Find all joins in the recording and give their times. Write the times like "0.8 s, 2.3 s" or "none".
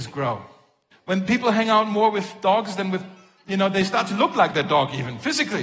0.9 s